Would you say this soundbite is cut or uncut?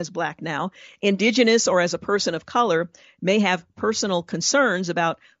uncut